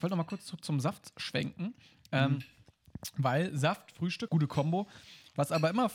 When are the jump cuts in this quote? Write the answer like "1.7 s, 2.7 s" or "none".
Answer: 4.3 s